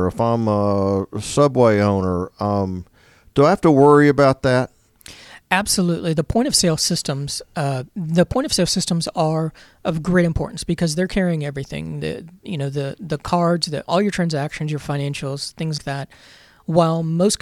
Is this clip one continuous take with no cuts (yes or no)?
no